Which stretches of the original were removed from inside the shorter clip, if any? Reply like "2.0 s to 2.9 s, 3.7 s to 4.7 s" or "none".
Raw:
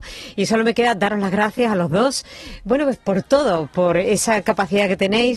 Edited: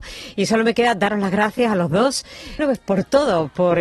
2.6 s to 2.8 s